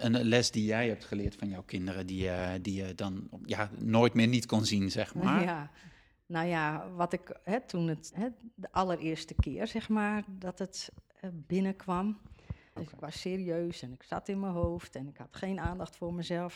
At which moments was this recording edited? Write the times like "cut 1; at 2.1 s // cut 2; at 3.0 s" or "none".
cut 1; at 8.1 s // cut 2; at 12.8 s